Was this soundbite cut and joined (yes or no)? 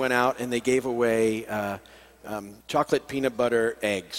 yes